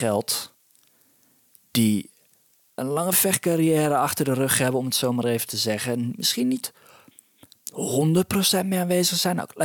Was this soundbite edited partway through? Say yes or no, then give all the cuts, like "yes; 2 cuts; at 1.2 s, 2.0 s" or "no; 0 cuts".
yes; 1 cut; at 2.8 s